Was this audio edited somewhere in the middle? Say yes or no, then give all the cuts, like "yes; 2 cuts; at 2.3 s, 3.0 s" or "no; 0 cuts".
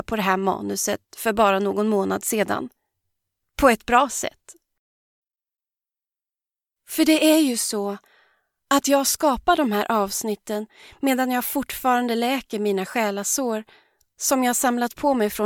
no; 0 cuts